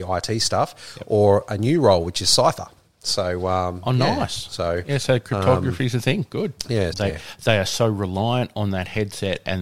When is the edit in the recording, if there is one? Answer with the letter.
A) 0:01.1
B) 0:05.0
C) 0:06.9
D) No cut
C